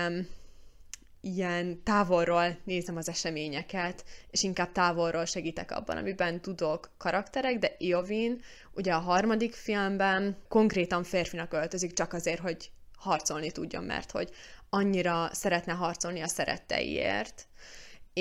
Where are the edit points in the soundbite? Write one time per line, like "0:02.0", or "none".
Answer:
none